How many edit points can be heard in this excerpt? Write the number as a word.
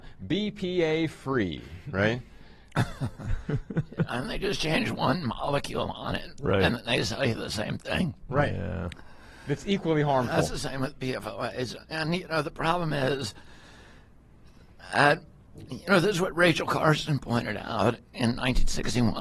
zero